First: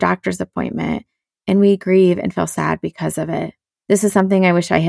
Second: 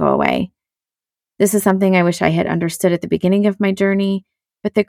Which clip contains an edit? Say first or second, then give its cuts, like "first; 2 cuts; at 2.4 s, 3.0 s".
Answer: first; 1 cut; at 3.7 s